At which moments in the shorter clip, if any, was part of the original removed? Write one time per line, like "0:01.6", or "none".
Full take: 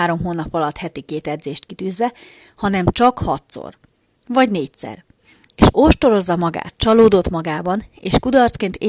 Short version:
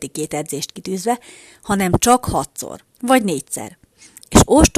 0:02.9